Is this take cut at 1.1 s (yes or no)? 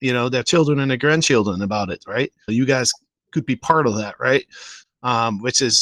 no